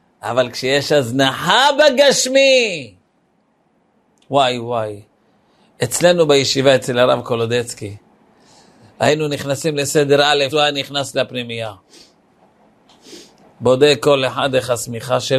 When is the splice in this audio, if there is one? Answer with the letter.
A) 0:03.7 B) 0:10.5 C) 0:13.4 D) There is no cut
B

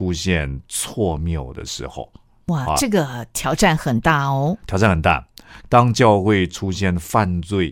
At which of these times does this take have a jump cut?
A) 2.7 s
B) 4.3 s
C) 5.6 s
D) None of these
C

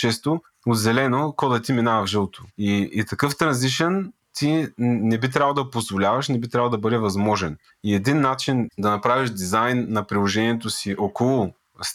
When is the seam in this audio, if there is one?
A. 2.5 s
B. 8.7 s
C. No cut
B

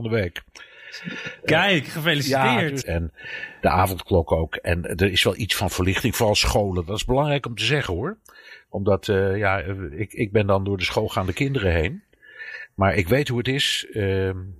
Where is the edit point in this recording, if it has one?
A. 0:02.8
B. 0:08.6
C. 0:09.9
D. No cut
A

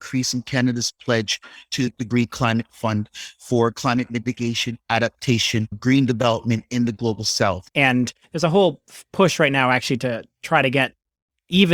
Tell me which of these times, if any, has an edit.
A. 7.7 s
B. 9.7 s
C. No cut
A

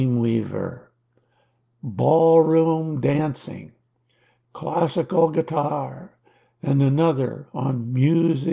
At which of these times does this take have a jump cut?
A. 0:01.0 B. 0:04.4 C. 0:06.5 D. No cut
D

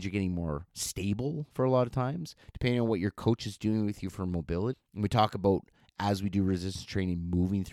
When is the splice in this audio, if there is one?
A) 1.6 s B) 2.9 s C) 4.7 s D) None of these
C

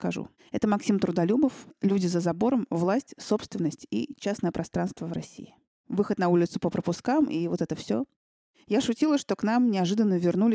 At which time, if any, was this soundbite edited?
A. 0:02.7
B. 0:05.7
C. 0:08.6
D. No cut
B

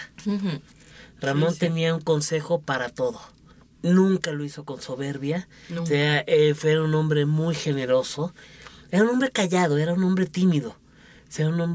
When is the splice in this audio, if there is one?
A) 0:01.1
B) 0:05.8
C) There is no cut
C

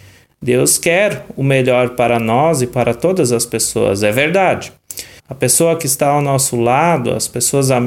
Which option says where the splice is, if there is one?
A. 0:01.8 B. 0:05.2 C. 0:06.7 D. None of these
B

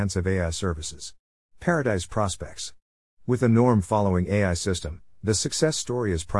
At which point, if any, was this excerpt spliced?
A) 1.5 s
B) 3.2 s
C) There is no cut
A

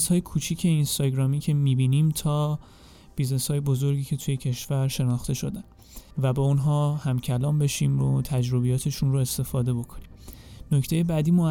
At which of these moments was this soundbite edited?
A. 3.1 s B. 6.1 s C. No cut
B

